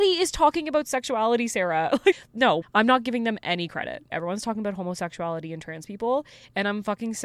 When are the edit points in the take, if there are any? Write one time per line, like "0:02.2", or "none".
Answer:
0:04.1